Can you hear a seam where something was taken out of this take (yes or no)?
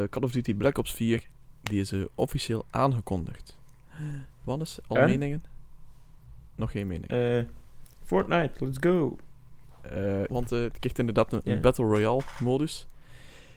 yes